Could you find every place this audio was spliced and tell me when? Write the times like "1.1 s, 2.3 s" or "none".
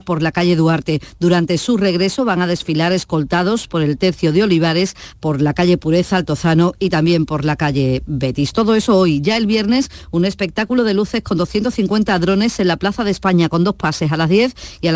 5.1 s